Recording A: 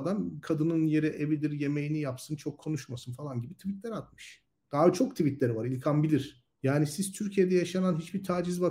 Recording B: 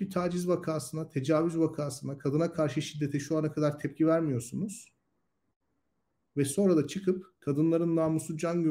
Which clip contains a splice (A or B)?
A